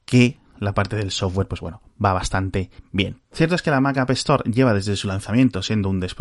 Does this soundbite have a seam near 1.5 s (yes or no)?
no